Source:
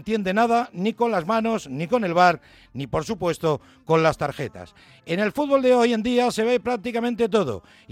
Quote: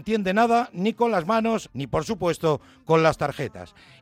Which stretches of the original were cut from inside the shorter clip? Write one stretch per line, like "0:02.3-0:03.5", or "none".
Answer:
0:01.7-0:02.7

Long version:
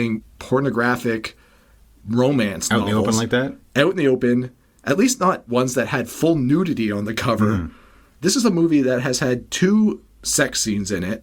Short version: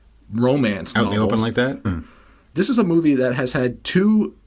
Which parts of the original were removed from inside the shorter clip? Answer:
0:03.6-0:07.5

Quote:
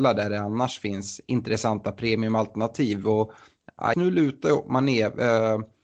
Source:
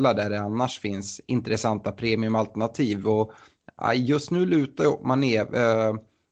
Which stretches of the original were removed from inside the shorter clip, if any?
0:03.9-0:04.3

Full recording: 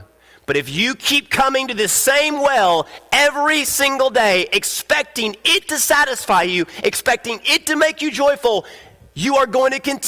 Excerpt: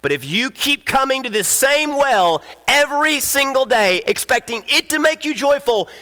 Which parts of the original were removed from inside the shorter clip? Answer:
0:04.5-0:06.8

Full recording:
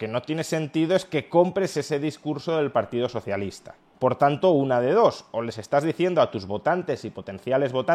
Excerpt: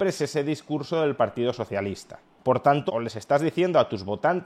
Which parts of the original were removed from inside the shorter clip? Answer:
0:04.4-0:05.3

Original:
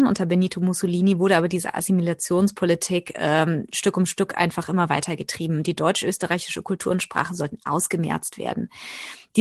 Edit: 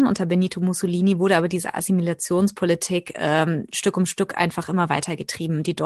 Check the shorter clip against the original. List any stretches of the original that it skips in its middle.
none

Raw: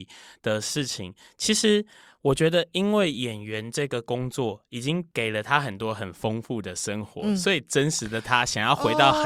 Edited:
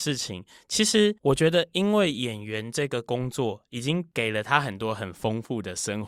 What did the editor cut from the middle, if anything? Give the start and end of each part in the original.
0:01.9-0:02.2

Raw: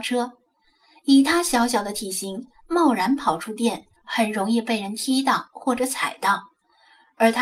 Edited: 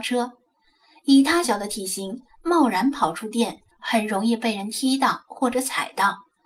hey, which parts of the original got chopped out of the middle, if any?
0:01.4-0:01.7

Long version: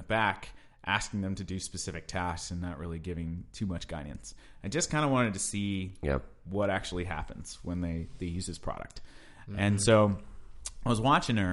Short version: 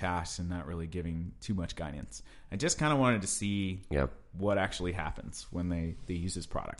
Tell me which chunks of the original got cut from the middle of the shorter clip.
none

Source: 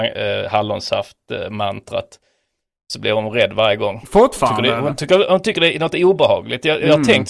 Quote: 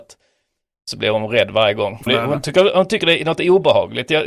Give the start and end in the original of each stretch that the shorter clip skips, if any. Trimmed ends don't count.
0:04.1-0:04.6

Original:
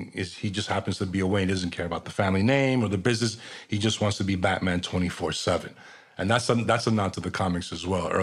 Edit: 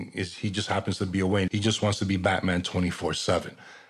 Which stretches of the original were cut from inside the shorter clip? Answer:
0:01.5-0:03.7

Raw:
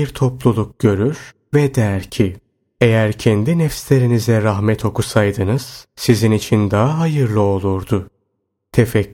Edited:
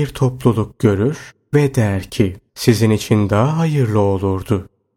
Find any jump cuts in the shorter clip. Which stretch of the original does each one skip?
0:02.5-0:05.9

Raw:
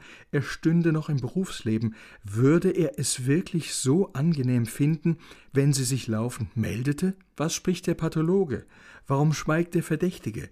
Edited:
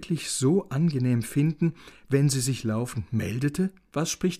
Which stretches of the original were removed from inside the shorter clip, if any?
none

